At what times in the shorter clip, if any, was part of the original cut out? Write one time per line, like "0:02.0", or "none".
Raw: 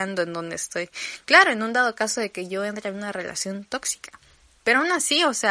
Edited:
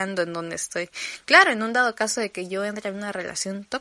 none